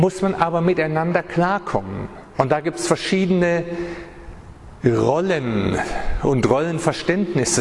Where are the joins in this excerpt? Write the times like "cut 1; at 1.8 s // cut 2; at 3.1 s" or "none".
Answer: cut 1; at 2.3 s